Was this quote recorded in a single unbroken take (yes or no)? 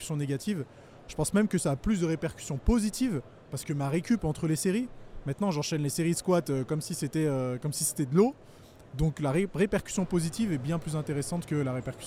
yes